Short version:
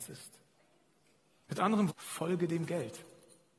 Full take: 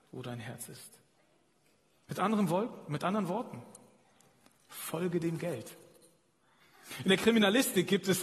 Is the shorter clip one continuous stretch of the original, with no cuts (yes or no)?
no